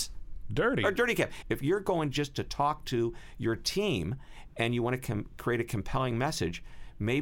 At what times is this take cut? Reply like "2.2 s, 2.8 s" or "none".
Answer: 1.4 s

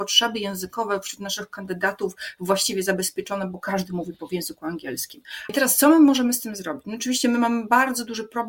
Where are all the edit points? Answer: 5.5 s

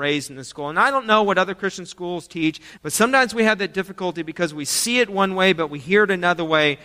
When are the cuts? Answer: 2.8 s

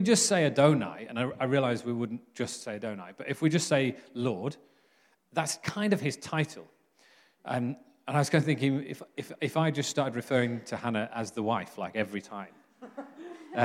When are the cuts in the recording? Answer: none

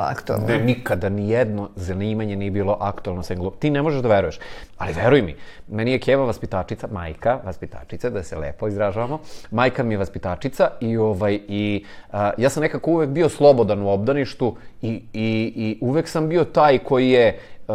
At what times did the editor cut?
4.7 s

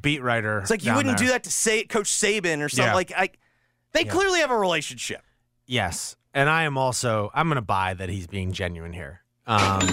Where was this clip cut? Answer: none

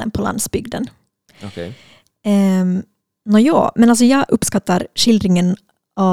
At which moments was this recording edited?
none

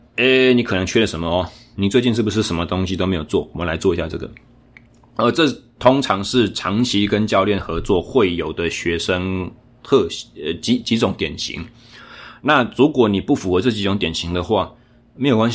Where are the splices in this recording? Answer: none

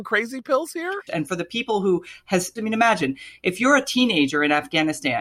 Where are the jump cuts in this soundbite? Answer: 1.1 s, 2.6 s

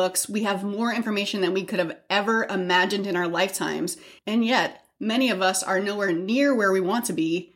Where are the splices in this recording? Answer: none

